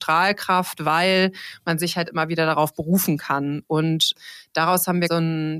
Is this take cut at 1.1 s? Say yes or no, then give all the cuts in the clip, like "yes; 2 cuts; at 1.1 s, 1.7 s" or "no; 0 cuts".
no; 1 cut; at 3.6 s